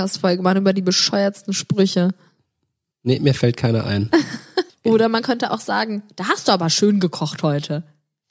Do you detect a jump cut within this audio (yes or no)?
yes